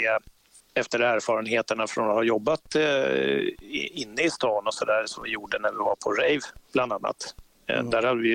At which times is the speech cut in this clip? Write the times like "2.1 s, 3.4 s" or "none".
none